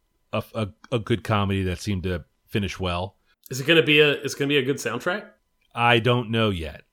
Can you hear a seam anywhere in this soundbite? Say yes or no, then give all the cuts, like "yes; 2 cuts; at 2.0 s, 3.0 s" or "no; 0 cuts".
yes; 1 cut; at 3.3 s